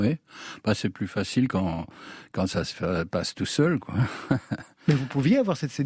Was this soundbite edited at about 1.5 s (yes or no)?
no